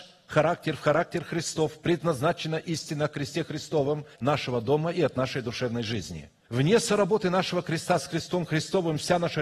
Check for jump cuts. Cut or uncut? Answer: cut